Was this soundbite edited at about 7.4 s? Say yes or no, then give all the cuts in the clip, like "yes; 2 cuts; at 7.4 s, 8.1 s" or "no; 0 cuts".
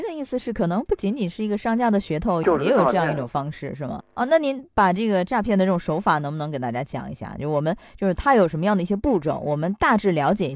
no; 2 cuts; at 2.4 s, 4.0 s